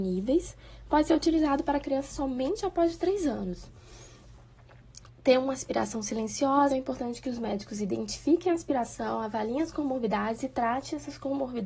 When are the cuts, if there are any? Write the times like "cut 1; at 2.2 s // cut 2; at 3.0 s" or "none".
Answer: cut 1; at 5.1 s // cut 2; at 6.7 s